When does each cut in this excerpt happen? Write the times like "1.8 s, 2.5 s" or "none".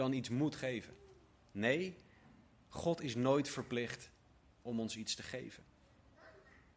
none